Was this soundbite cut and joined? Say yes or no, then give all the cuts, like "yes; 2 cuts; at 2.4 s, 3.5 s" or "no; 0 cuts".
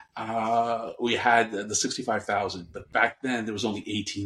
no; 0 cuts